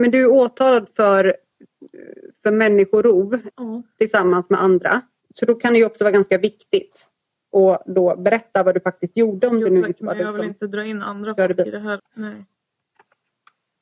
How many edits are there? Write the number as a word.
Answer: three